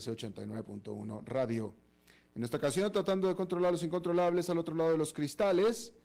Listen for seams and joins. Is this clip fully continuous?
yes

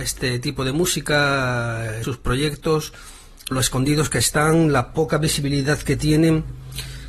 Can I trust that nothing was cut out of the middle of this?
no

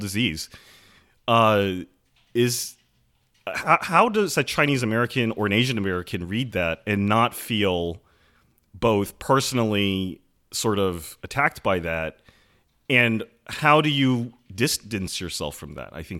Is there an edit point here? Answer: no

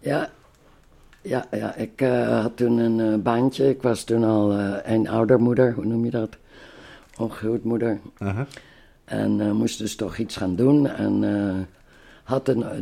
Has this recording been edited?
no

